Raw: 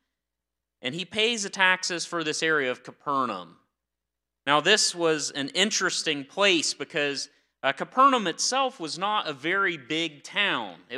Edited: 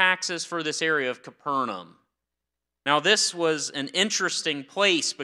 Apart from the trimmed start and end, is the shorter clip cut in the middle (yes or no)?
no